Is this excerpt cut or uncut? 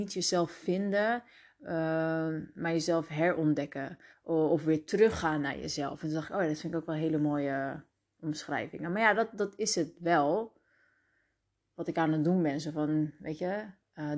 uncut